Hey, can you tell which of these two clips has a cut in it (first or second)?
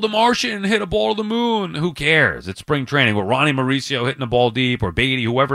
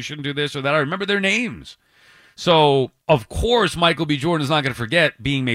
second